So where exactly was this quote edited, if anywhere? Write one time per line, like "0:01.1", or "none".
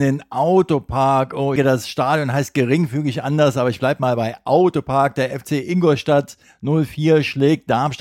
0:01.6